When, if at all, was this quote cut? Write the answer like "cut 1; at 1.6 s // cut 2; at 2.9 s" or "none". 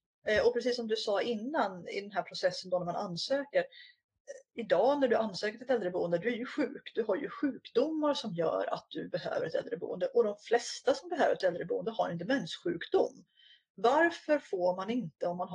none